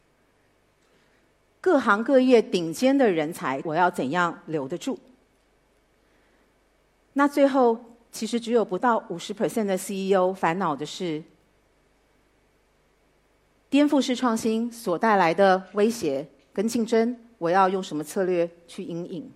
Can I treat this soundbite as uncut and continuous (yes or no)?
no